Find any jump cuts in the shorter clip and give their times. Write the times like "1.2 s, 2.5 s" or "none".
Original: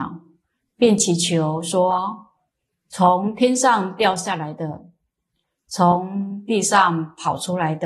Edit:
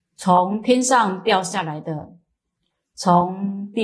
none